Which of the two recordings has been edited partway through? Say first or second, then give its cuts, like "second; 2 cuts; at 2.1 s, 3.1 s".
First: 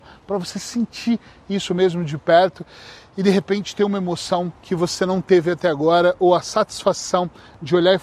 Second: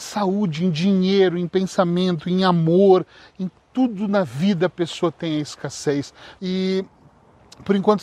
second; 1 cut; at 6.4 s